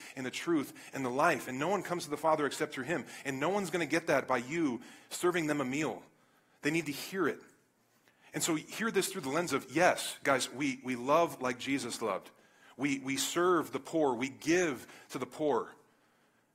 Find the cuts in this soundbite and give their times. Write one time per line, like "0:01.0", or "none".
none